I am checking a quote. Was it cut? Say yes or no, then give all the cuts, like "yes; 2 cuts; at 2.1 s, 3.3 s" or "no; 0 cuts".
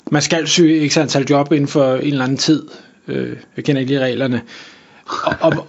no; 0 cuts